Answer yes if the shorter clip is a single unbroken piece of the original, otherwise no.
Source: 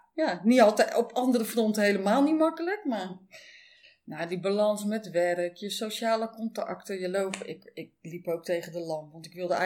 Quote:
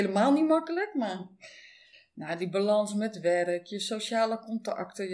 yes